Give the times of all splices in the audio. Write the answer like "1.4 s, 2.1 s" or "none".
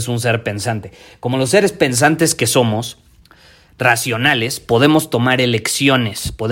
none